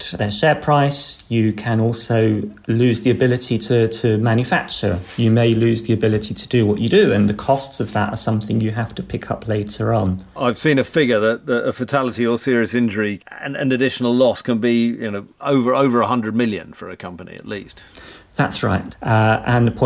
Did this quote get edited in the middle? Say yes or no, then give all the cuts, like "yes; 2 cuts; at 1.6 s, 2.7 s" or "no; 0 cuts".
yes; 1 cut; at 18.9 s